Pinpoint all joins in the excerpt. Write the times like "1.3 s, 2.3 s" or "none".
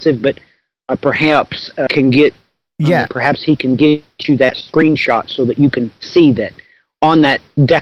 1.9 s, 3.1 s